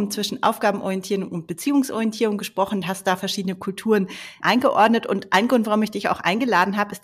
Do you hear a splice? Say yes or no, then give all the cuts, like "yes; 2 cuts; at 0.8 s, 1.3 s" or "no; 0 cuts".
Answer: yes; 1 cut; at 4.4 s